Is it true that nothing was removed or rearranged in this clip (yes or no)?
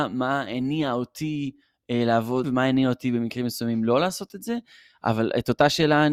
no